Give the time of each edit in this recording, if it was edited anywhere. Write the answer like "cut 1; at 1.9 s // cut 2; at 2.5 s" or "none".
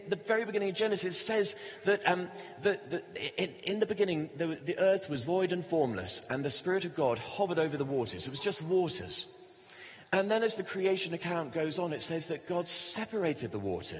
none